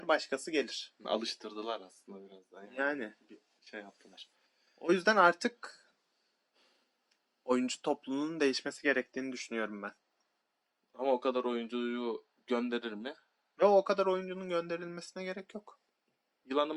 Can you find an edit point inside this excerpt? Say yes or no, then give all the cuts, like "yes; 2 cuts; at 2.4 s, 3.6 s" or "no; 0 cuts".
no; 0 cuts